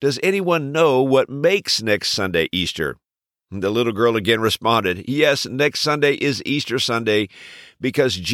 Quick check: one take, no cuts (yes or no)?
yes